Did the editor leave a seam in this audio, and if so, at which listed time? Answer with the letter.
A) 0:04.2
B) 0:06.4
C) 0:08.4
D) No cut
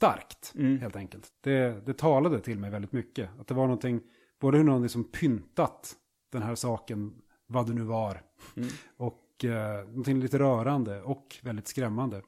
D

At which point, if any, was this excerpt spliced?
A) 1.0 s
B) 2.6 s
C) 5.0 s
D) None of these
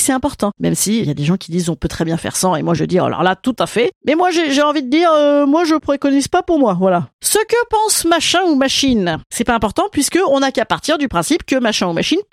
A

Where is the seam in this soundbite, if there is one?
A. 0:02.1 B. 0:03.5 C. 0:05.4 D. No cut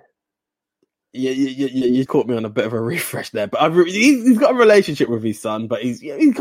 A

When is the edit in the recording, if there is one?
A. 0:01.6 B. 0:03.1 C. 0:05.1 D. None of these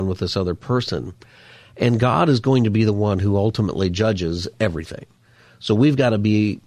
A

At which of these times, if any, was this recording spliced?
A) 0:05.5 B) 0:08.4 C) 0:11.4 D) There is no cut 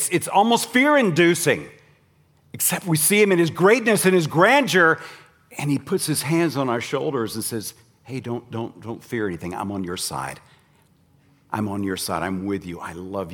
D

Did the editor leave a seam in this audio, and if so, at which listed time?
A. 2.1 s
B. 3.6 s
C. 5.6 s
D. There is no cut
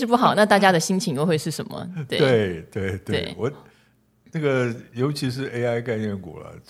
D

